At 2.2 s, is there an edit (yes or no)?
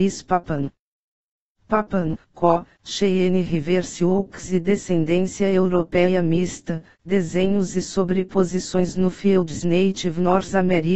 yes